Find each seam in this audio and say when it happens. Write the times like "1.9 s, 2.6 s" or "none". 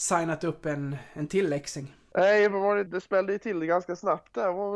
2.9 s